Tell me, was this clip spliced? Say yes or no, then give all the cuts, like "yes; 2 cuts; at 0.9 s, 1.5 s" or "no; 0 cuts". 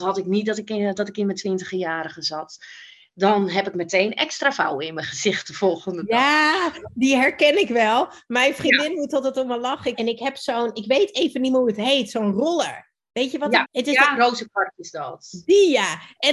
yes; 2 cuts; at 9.9 s, 13.6 s